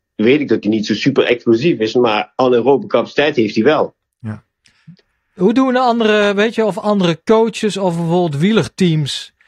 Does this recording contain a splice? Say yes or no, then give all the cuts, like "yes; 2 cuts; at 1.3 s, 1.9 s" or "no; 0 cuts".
no; 0 cuts